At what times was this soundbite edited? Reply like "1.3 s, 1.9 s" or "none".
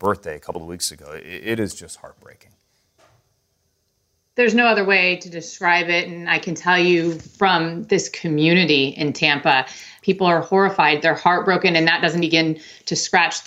10.0 s, 12.2 s